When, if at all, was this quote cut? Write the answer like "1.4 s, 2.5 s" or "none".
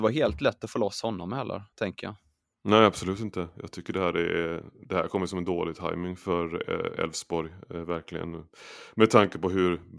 1.7 s